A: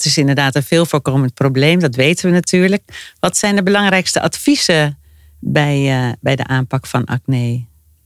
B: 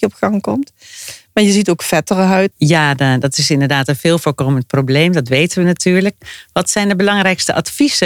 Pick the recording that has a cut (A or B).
B